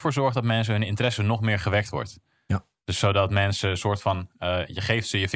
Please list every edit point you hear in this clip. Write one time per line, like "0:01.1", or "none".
none